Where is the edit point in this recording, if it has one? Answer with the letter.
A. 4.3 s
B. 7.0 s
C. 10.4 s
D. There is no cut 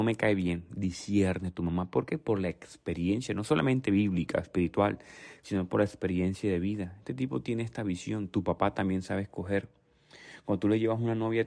D